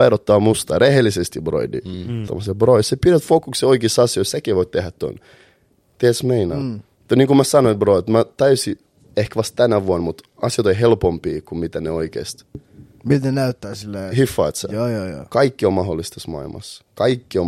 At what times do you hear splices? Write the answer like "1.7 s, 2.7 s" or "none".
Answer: 2.3 s